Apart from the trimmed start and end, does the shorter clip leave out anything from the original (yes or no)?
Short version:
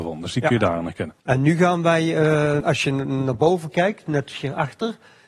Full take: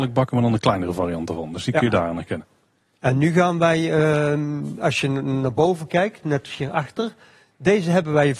yes